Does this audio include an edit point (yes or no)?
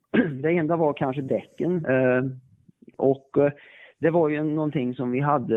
yes